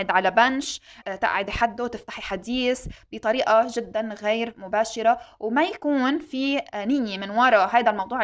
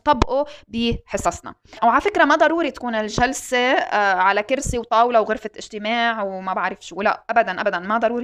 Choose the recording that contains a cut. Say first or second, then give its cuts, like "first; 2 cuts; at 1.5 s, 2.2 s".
first; 1 cut; at 1.0 s